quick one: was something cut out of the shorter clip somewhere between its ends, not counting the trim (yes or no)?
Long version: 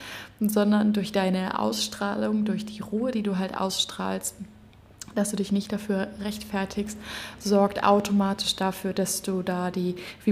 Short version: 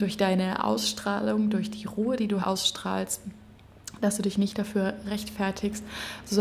yes